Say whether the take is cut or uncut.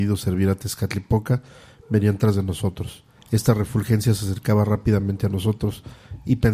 cut